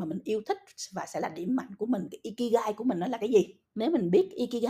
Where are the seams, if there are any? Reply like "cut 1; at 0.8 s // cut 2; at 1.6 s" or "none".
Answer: cut 1; at 3.6 s